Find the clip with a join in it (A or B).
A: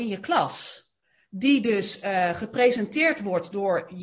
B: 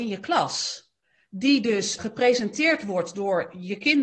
B